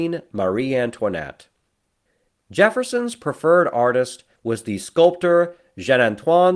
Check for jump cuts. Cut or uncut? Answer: cut